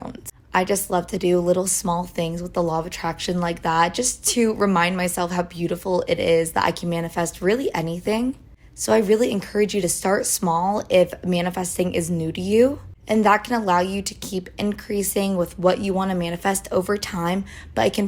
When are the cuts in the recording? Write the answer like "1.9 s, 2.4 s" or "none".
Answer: none